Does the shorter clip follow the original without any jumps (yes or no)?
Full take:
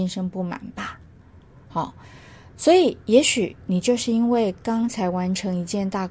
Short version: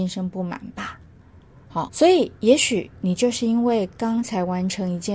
no